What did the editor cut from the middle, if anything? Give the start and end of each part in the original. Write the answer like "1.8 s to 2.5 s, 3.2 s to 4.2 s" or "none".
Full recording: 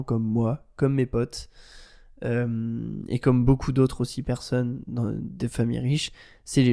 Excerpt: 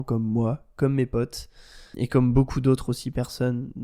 1.9 s to 3.1 s